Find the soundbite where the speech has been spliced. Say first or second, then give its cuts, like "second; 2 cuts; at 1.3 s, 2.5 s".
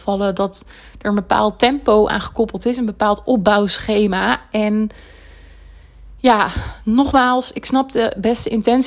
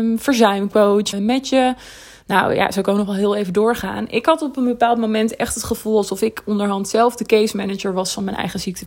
second; 1 cut; at 1.1 s